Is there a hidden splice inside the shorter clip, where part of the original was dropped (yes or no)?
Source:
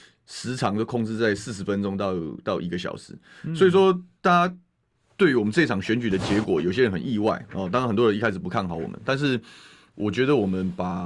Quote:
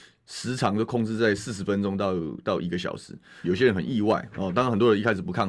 yes